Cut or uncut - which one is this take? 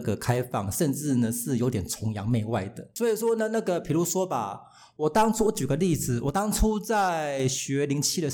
uncut